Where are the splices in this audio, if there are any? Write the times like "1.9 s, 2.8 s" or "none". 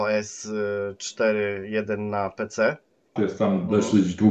3.2 s